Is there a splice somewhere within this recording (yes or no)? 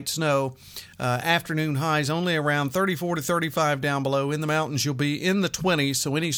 no